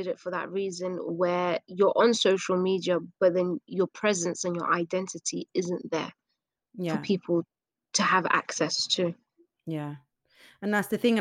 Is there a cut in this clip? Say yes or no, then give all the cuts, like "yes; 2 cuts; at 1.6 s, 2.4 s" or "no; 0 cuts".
no; 0 cuts